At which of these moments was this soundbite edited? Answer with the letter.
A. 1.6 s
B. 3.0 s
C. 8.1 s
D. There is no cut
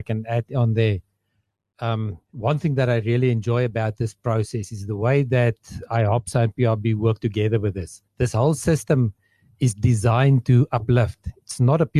C